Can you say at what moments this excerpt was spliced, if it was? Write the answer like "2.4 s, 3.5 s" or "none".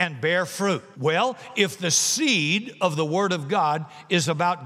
0.9 s